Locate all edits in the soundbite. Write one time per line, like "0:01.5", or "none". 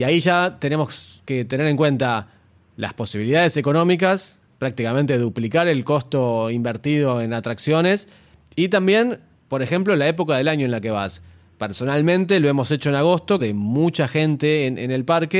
0:13.4